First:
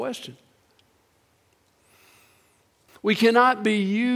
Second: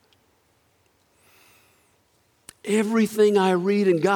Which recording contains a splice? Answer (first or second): first